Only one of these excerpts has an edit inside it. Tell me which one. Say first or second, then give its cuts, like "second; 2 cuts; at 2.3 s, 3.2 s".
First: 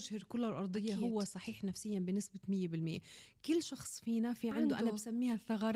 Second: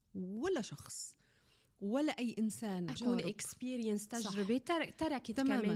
second; 1 cut; at 3.0 s